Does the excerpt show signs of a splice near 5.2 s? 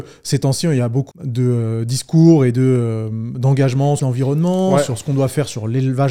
no; 2 cuts; at 1.1 s, 4.0 s

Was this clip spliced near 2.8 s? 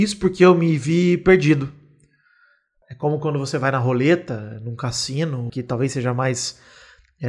yes; 2 cuts; at 2.8 s, 5.5 s

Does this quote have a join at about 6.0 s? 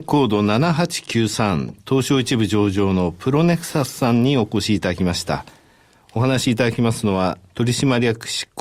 no; 0 cuts

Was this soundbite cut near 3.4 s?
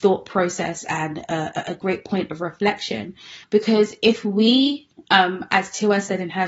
yes; 1 cut; at 3.4 s

